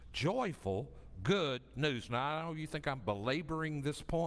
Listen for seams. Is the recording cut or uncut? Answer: uncut